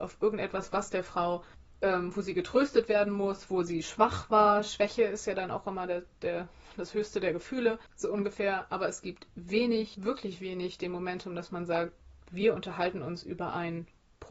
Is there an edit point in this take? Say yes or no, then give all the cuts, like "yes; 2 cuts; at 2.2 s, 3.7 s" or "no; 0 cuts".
no; 0 cuts